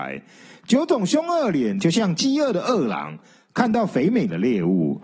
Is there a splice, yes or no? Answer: yes